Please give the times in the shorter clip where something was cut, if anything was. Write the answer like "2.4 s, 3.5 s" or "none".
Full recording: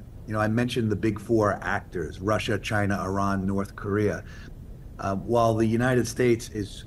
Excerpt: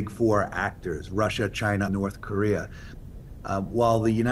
1.9 s